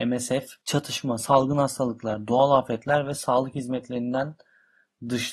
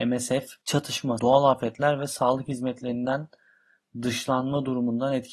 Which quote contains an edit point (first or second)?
second